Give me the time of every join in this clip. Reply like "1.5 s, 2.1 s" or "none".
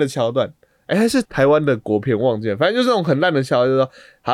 1.2 s